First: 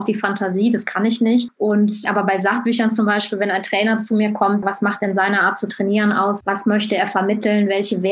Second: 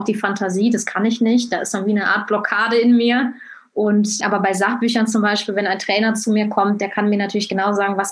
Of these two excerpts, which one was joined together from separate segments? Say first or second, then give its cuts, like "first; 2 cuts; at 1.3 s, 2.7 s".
first; 3 cuts; at 1.5 s, 4.6 s, 6.4 s